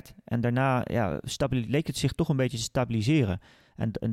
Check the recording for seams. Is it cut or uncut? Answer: uncut